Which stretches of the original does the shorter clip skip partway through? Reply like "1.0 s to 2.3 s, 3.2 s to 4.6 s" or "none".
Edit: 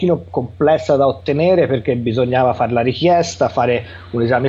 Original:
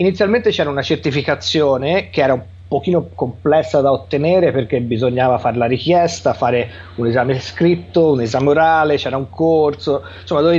none

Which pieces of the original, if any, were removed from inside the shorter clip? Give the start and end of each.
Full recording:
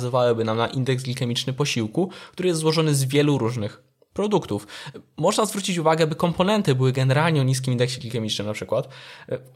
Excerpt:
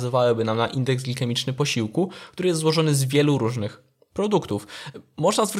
none

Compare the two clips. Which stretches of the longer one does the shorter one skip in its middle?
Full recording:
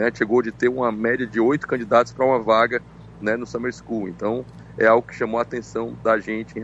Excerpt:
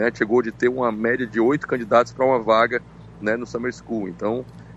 none

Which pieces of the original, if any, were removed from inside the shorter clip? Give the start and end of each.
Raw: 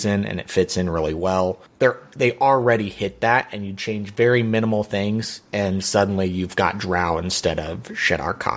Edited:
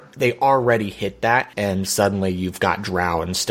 3.5 s to 5.5 s

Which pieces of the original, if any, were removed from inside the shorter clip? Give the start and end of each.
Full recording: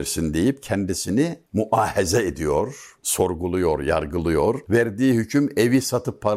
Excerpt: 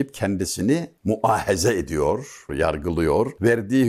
3.0 s to 3.8 s

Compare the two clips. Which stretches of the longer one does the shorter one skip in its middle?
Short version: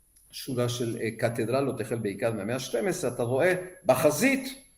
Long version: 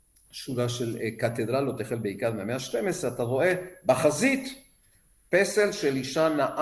none

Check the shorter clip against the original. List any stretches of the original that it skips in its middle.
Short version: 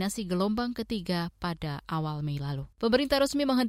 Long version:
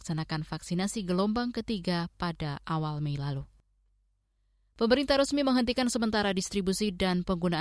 3.5 s to 4.7 s

